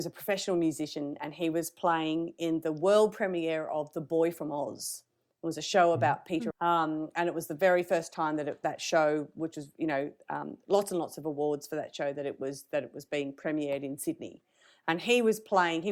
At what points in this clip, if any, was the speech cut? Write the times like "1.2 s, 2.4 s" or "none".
6.5 s